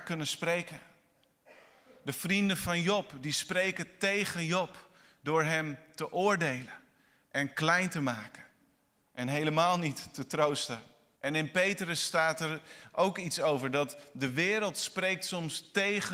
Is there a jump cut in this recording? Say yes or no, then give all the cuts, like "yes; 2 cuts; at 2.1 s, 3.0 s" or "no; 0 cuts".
yes; 1 cut; at 11.2 s